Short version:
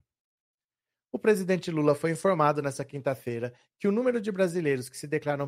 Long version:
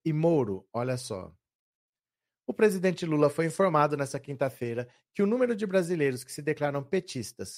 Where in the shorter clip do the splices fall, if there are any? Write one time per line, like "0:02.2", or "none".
none